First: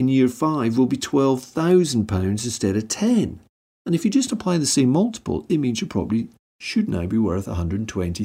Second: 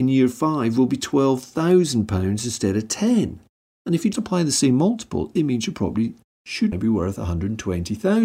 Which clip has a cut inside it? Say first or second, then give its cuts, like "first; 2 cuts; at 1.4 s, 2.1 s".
second; 2 cuts; at 4.1 s, 6.7 s